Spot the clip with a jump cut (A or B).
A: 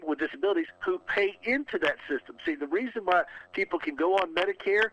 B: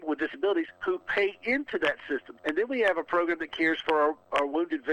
B